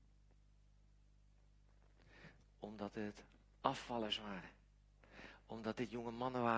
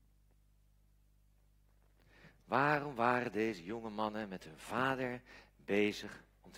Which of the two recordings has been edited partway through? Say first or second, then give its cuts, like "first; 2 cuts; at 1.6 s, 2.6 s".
first; 1 cut; at 2.4 s